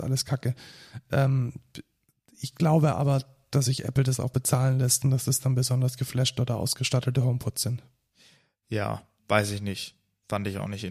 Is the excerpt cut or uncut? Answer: cut